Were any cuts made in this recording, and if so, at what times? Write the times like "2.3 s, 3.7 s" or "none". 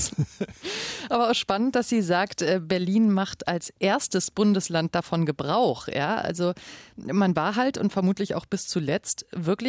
none

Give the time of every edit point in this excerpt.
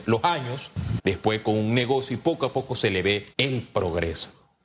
1.0 s, 3.3 s

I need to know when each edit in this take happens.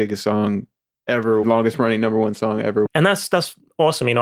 1.4 s, 2.8 s

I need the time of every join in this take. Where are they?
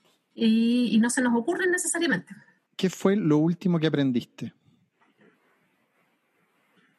2.7 s

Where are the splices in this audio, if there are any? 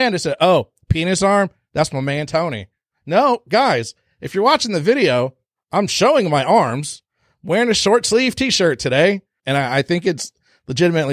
9.4 s

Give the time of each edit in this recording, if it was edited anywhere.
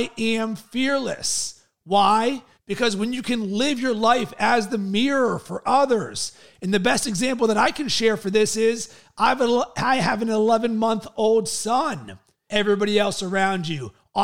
2.6 s, 12.5 s

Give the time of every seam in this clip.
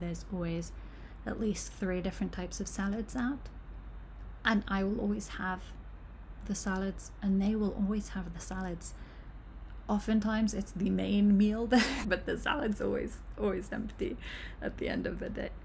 12.0 s

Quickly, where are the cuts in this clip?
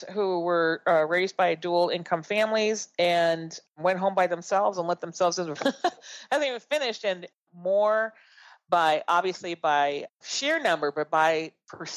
5.6 s

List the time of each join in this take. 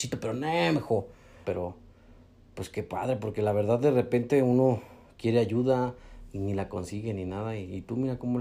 1.4 s

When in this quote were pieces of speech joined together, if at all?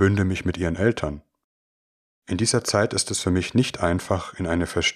2.2 s

